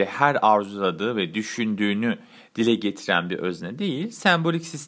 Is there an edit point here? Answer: no; 0 cuts

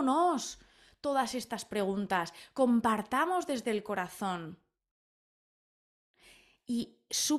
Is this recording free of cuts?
yes; 0 cuts

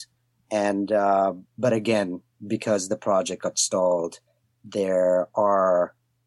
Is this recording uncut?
yes; 0 cuts

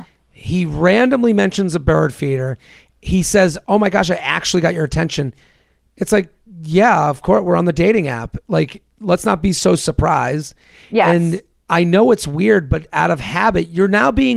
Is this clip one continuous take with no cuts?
yes; 0 cuts

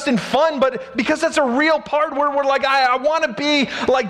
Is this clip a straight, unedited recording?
yes; 0 cuts

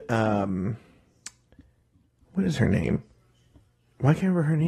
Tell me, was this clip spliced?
no; 0 cuts

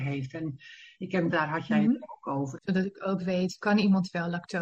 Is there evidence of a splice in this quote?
yes; 2 cuts; at 1.3 s, 2.6 s

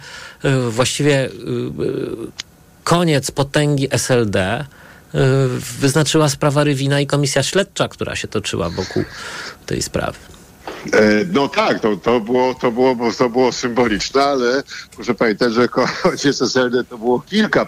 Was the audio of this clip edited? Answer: no; 0 cuts

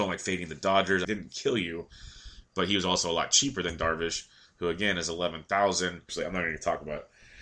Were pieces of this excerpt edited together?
yes; 2 cuts; at 1.0 s, 6.1 s

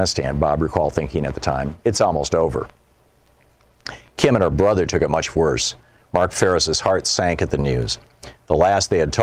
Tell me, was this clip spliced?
no; 0 cuts

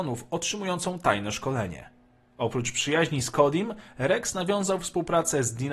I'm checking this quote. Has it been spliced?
no; 0 cuts

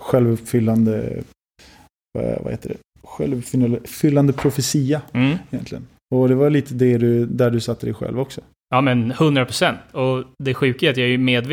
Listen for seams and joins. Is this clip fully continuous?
yes; 0 cuts

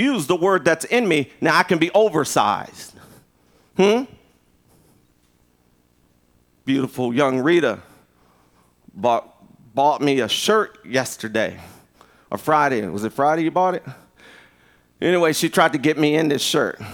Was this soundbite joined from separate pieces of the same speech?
no; 0 cuts

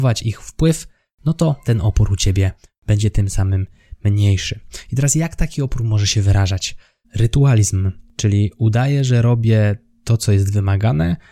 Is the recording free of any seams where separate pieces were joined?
no; 1 cut; at 7.0 s

